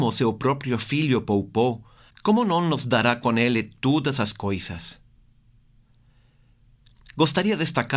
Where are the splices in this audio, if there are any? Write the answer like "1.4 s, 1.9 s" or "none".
2.1 s